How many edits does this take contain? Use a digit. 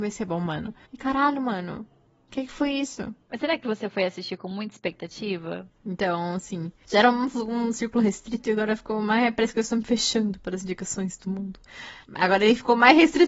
2